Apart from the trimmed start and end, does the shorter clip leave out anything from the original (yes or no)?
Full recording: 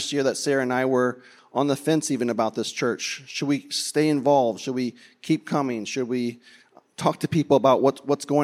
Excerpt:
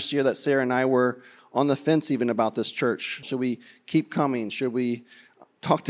yes